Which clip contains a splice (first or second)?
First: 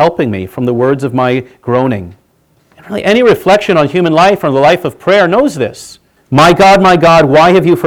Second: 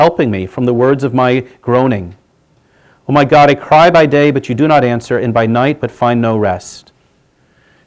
first